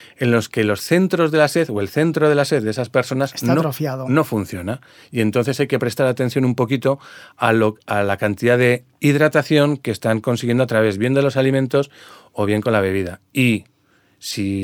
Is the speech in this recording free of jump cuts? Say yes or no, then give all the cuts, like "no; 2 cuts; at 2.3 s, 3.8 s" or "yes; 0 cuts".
yes; 0 cuts